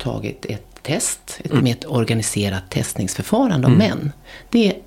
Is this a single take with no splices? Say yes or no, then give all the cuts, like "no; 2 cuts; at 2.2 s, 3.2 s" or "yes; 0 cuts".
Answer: no; 1 cut; at 1.6 s